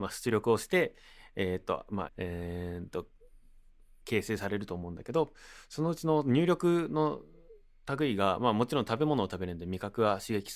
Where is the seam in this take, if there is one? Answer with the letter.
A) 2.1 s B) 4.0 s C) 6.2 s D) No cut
A